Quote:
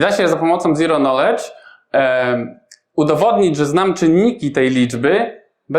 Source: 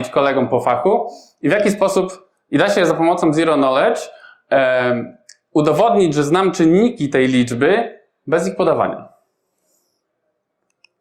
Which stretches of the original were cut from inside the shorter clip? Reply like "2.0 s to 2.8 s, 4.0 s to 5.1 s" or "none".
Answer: none